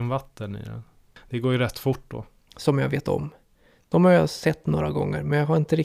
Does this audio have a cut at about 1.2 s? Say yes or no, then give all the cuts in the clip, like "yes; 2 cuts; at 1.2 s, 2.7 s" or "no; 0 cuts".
no; 1 cut; at 2.5 s